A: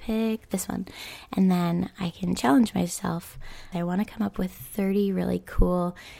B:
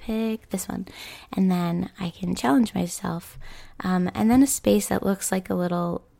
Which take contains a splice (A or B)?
A